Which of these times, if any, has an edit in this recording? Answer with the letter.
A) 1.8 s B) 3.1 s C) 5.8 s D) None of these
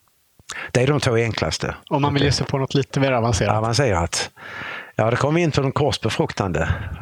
A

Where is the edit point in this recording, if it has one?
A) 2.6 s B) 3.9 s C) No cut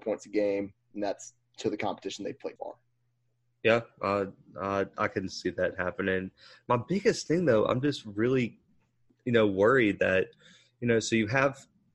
A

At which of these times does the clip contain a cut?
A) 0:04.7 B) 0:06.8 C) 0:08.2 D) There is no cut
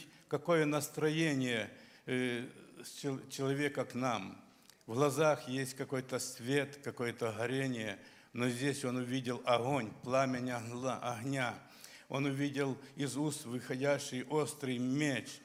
D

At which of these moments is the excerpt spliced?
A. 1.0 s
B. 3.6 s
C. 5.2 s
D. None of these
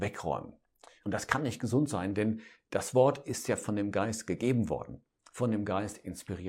A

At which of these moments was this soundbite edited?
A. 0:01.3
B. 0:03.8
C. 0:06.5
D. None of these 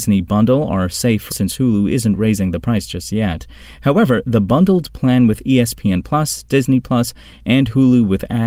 A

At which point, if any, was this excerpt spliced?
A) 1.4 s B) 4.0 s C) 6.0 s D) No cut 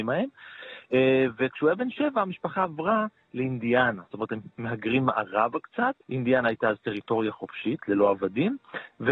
C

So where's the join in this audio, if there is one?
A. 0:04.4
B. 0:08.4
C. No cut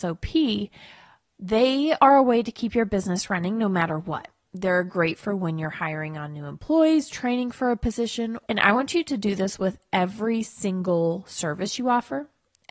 B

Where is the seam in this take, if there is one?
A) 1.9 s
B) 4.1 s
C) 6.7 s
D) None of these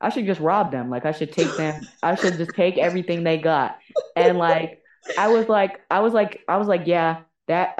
D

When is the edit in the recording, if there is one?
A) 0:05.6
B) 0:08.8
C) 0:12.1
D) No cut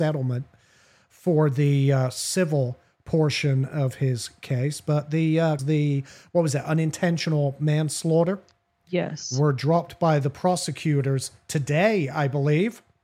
A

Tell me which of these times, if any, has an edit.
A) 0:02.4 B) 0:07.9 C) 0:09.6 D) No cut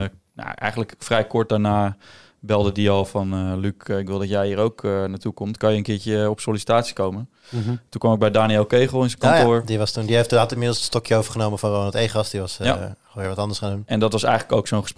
D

